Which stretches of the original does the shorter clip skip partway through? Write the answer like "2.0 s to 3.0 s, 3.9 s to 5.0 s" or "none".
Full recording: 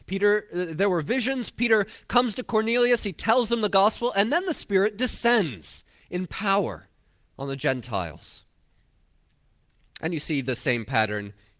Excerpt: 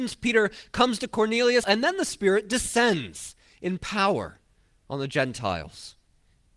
3.0 s to 4.1 s